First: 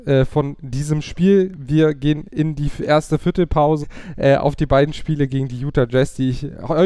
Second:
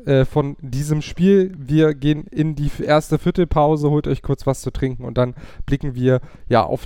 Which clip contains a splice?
first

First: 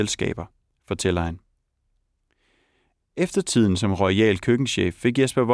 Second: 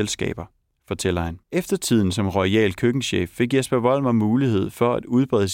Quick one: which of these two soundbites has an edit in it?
second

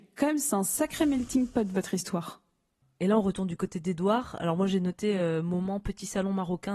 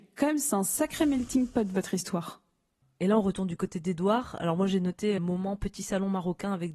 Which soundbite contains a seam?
second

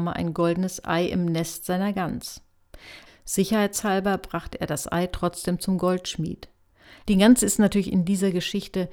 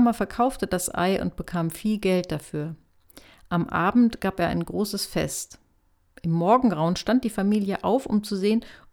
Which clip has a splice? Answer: first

